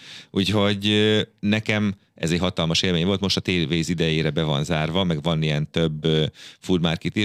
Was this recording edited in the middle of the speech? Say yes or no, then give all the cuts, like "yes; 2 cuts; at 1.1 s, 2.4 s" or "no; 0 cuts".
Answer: no; 0 cuts